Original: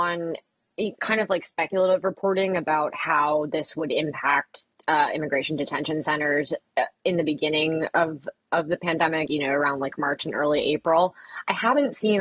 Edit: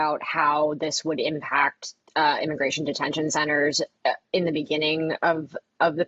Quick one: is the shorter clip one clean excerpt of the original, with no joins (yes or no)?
yes